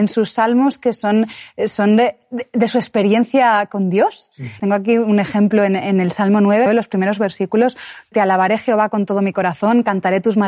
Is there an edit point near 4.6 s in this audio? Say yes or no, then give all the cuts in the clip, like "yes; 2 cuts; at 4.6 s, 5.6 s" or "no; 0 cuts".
yes; 3 cuts; at 4.6 s, 6.7 s, 8.1 s